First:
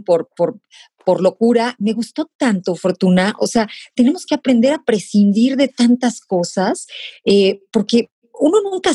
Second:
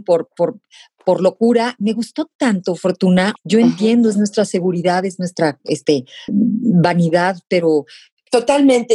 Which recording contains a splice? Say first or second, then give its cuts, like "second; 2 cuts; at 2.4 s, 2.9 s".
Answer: second; 2 cuts; at 3.4 s, 6.3 s